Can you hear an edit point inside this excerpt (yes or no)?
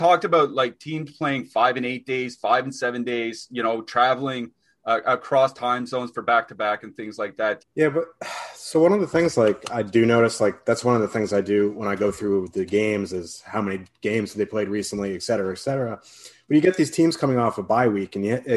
yes